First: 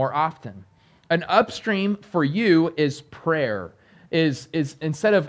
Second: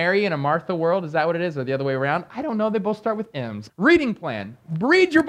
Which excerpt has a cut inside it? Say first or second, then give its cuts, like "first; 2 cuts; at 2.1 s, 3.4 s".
second; 1 cut; at 3.7 s